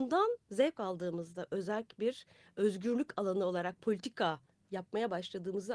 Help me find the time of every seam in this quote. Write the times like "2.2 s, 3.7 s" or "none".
none